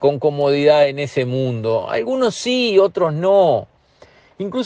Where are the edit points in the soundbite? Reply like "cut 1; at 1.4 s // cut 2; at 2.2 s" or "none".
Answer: none